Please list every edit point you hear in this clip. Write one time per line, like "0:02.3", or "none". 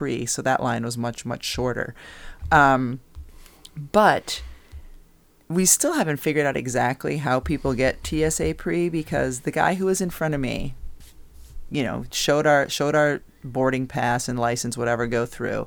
none